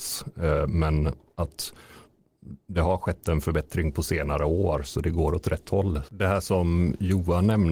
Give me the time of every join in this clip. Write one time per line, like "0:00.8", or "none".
0:06.1